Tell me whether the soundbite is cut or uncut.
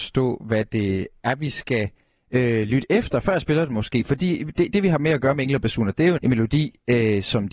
cut